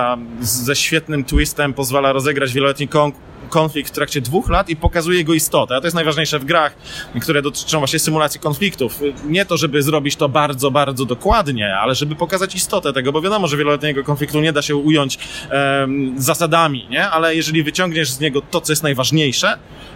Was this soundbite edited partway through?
no; 0 cuts

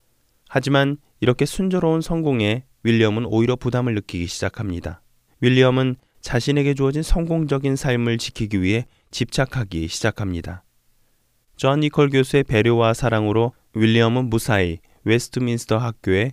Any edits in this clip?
yes; 2 cuts; at 5.3 s, 11.4 s

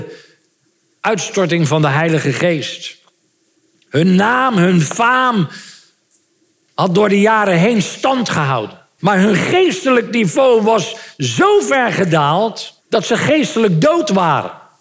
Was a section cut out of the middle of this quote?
yes; 2 cuts; at 9.0 s, 12.8 s

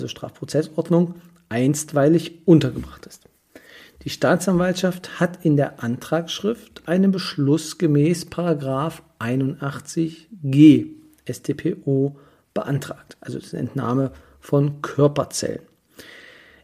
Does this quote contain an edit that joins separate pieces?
no; 0 cuts

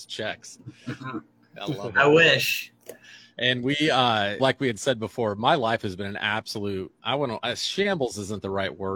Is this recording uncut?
no; 1 cut; at 4.4 s

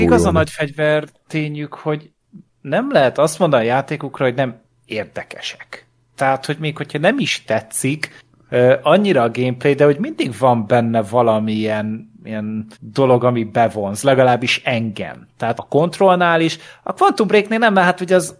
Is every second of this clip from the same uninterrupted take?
no; 2 cuts; at 12.7 s, 15.5 s

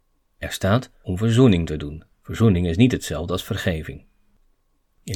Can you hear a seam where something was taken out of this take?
yes; 1 cut; at 2.1 s

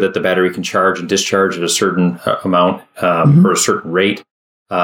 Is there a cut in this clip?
no; 0 cuts

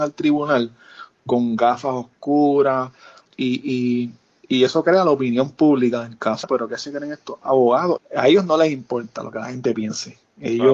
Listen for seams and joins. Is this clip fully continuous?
no; 3 cuts; at 3.3 s, 6.4 s, 8.0 s

